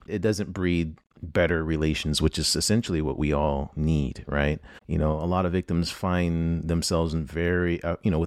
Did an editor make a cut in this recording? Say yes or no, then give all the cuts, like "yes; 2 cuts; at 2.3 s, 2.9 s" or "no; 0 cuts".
yes; 1 cut; at 4.8 s